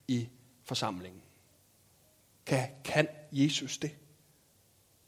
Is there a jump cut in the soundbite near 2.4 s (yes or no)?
yes